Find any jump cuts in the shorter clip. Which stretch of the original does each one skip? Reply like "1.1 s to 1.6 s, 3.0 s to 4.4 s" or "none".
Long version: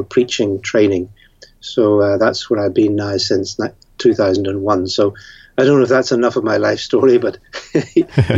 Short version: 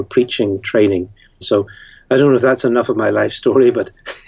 1.4 s to 4.9 s